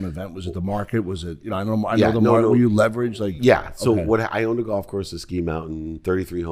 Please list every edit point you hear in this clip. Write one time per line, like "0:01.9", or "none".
none